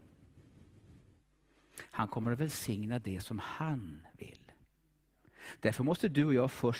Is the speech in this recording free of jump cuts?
yes; 0 cuts

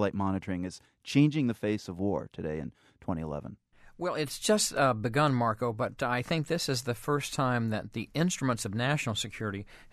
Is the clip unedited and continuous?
yes; 0 cuts

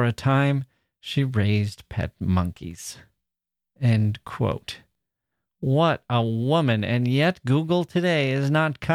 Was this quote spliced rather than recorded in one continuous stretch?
no; 0 cuts

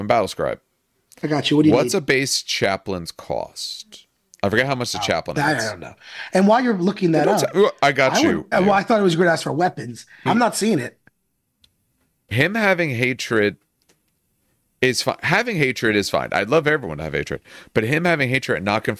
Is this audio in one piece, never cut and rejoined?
no; 2 cuts; at 8.5 s, 10.3 s

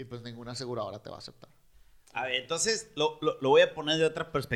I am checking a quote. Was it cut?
yes; 1 cut; at 3.4 s

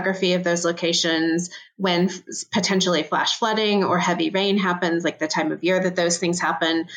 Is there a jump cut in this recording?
no; 0 cuts

